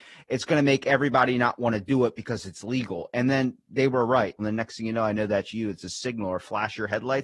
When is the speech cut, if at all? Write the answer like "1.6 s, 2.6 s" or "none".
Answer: 4.4 s